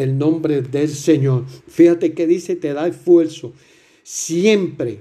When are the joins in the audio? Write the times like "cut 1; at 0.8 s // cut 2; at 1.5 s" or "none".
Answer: cut 1; at 1.6 s